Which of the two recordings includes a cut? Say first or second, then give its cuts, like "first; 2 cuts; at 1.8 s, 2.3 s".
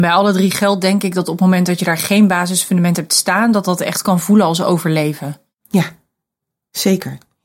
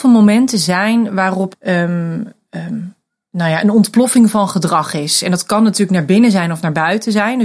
second; 1 cut; at 1.5 s